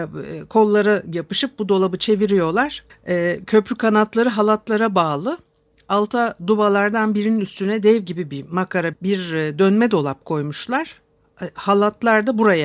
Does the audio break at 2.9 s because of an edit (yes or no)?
yes